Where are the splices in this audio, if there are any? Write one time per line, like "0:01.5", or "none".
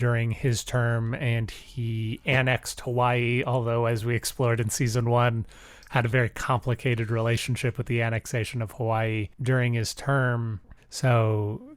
0:10.8